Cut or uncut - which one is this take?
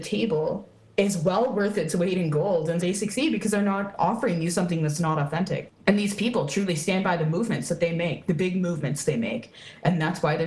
cut